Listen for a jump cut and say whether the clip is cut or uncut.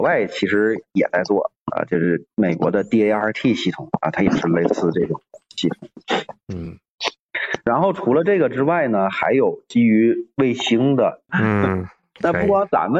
cut